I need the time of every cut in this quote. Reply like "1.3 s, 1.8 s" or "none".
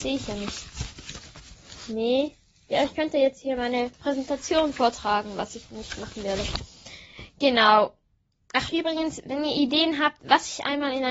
none